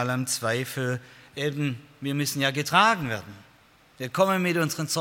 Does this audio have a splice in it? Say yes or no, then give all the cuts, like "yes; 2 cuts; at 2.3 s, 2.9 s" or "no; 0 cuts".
no; 0 cuts